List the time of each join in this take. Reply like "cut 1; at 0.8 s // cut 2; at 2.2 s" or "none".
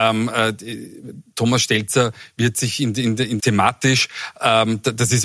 cut 1; at 3.4 s